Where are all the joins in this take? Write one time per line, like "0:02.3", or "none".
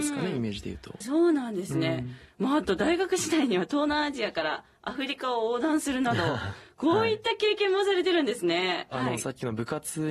0:01.0
0:08.9